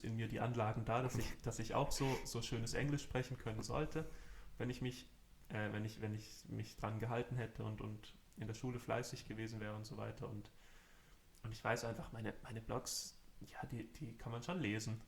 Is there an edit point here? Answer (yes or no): no